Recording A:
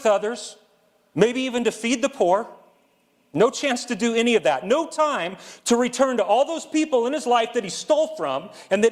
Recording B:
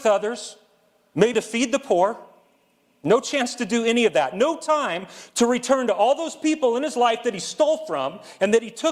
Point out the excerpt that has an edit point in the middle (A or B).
B